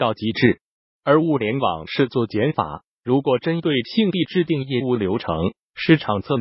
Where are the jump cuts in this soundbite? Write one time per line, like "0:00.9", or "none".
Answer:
0:02.9